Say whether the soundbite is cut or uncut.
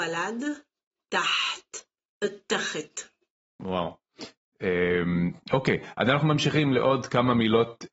uncut